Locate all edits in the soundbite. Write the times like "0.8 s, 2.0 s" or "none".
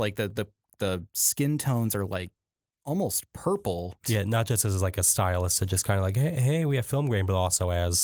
4.0 s